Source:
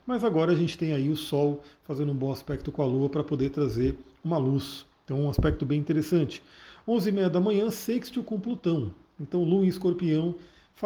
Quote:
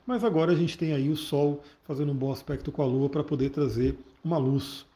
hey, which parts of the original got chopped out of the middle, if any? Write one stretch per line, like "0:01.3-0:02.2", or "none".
none

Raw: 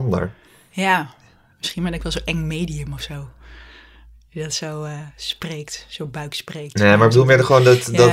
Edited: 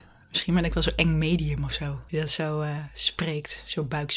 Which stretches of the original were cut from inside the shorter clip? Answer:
0:03.4-0:04.3

